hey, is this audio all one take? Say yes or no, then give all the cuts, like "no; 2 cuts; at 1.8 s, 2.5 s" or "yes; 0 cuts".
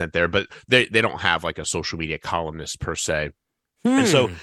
yes; 0 cuts